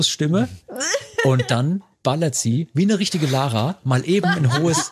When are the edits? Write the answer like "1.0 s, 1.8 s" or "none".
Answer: none

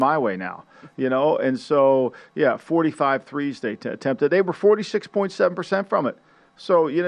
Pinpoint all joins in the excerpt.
none

